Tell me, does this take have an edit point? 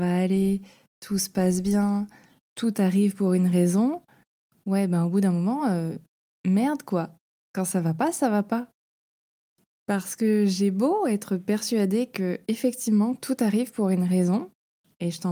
no; 0 cuts

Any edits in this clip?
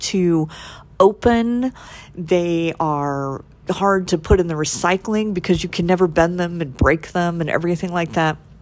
no; 0 cuts

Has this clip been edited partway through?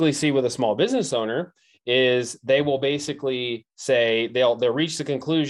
no; 0 cuts

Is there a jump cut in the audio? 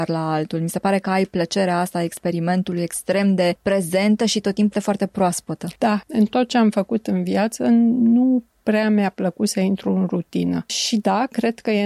yes; 2 cuts; at 4.7 s, 10.7 s

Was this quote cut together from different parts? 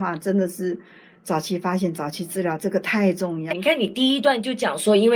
yes; 1 cut; at 3.5 s

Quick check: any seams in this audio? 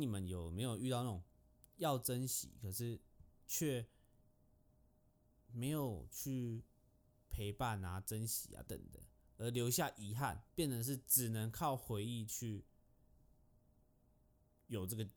yes; 2 cuts; at 8.7 s, 10.5 s

